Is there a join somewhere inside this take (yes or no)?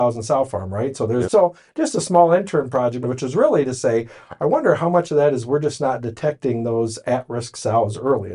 yes